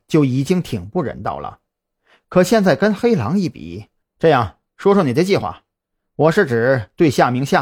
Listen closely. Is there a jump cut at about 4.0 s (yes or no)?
yes